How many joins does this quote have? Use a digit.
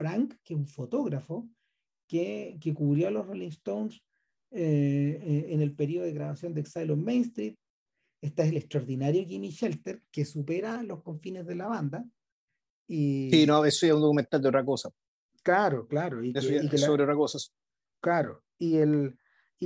0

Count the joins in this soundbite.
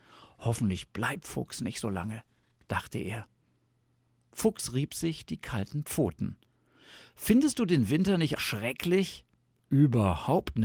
1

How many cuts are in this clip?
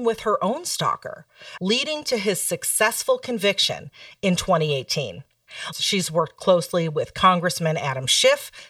2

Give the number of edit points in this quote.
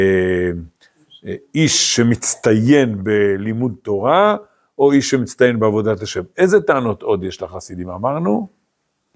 0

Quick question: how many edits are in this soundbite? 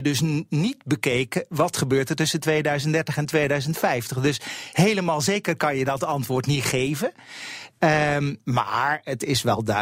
0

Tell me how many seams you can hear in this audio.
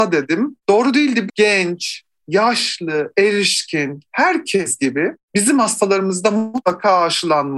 1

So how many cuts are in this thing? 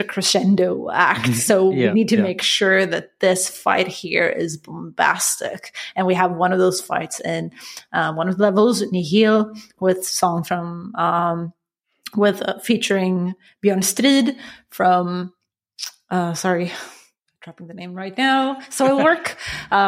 0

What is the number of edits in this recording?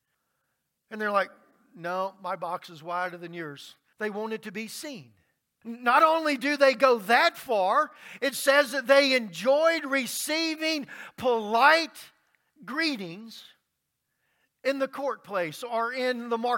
2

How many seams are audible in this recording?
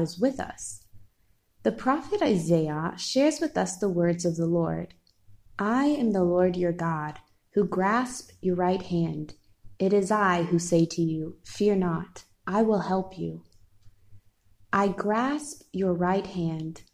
0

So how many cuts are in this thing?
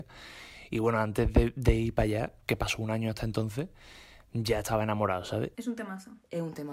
1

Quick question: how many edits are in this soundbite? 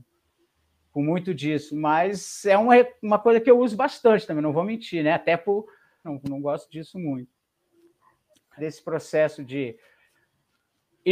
2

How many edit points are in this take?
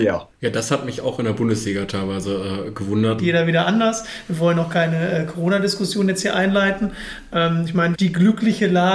2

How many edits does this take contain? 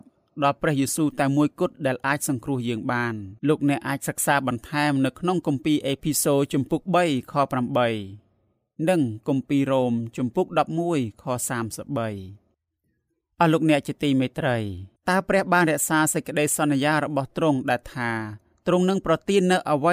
2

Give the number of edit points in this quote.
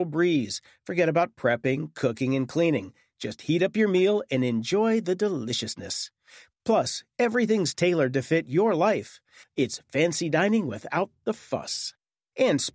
1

